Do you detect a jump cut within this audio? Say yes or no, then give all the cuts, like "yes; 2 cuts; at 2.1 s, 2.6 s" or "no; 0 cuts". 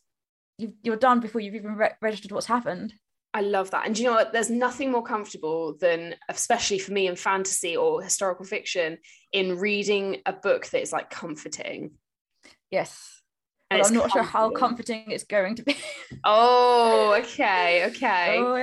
no; 0 cuts